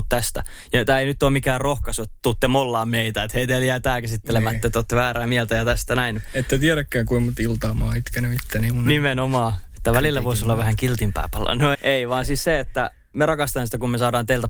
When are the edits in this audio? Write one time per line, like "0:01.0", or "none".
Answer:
0:11.7